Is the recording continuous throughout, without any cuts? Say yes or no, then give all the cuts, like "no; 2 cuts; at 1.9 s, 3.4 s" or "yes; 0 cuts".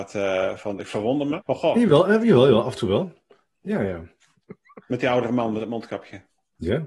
no; 1 cut; at 1.4 s